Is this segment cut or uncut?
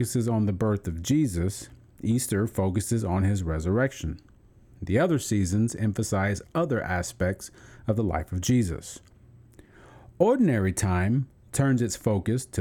uncut